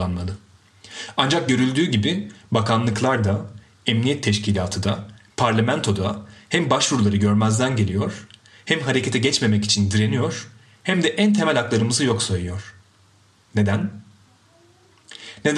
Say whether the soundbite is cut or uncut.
uncut